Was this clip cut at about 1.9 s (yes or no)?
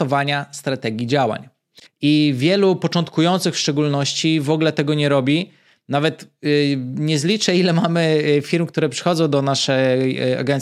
yes